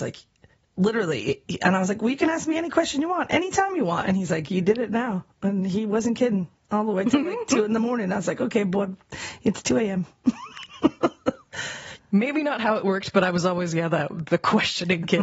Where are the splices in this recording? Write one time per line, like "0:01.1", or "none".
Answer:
0:12.0